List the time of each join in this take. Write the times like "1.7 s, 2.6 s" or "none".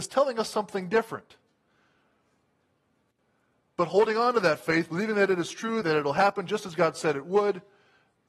5.8 s